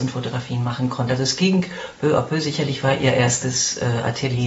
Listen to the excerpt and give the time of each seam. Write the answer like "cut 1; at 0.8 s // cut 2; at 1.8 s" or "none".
none